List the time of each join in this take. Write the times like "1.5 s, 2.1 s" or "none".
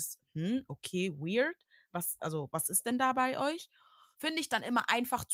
4.1 s